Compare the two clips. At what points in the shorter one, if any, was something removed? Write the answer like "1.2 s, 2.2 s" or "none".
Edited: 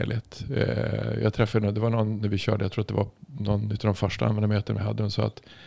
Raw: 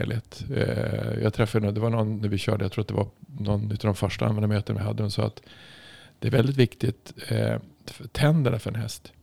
none

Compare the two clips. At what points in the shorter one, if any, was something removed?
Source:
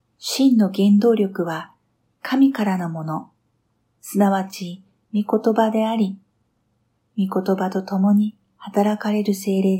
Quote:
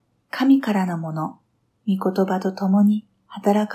1.7 s

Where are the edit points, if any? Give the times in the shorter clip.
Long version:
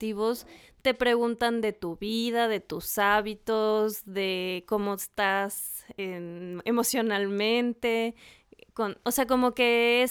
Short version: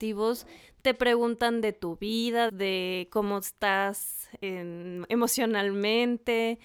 2.5 s

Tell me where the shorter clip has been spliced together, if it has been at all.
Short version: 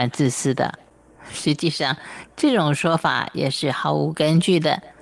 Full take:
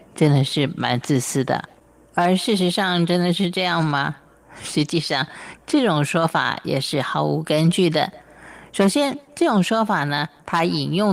1.2 s

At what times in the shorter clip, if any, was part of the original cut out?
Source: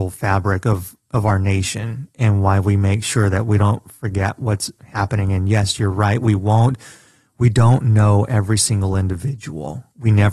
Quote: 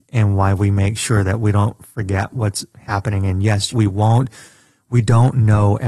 3.7 s

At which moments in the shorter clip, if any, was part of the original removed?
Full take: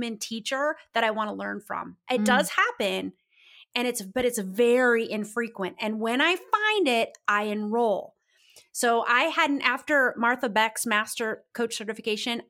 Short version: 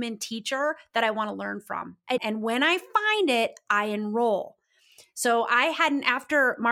2.2 s

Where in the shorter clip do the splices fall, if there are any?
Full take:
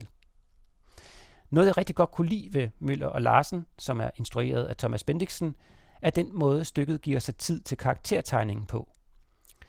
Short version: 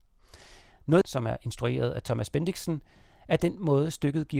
1.0 s

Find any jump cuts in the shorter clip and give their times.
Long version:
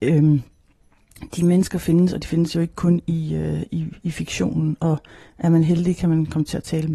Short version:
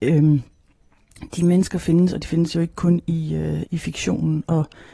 3.7 s

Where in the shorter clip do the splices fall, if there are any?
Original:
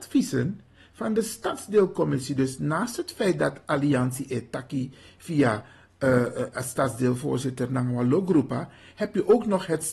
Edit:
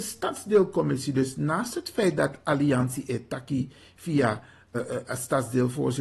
4.7 s

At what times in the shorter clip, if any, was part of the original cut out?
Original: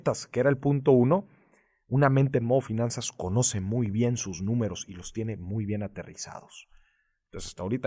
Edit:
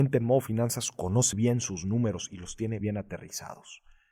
1.3 s, 2.8 s

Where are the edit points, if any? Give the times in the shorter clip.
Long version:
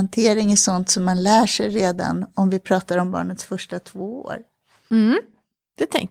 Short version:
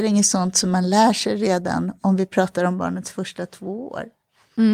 none

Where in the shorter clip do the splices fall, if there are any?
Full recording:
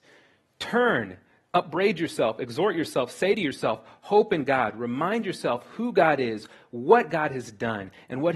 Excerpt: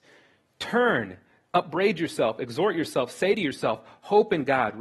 none

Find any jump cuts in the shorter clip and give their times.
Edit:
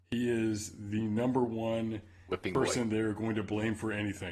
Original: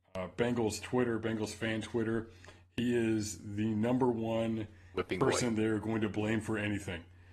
none

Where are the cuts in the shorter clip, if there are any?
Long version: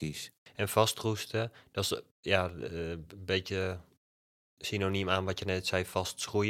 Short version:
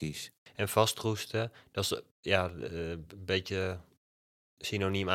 none

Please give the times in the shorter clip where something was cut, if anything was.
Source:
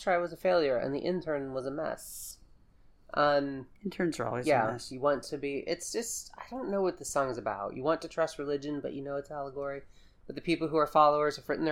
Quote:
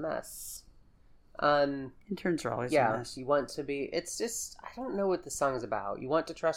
none

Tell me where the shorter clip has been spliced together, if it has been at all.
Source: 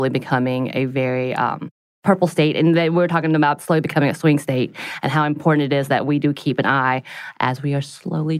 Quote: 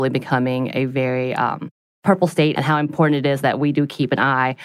2.5 s

